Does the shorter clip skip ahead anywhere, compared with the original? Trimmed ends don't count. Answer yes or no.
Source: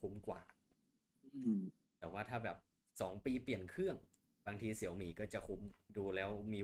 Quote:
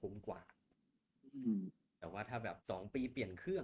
yes